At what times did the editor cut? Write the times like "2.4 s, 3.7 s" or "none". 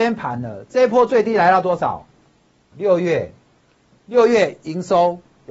2.7 s